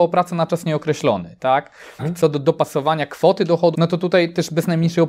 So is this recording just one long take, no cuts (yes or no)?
no